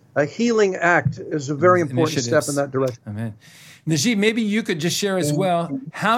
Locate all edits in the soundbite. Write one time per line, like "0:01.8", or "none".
none